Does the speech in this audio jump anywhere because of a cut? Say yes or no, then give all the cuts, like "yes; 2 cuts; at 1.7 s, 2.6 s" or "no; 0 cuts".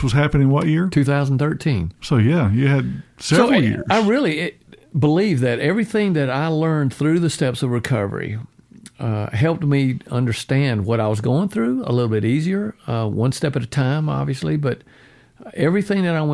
no; 0 cuts